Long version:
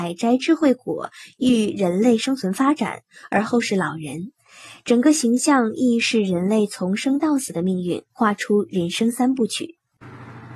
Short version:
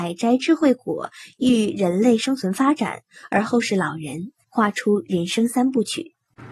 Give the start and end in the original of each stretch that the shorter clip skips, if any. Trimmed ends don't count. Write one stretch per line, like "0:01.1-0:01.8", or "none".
0:04.4-0:08.1